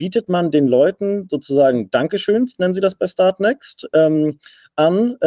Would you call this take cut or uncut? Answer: uncut